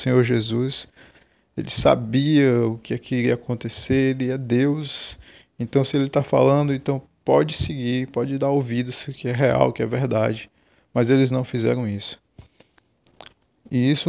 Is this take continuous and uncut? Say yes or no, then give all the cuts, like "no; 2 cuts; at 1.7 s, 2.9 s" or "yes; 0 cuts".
no; 1 cut; at 8.1 s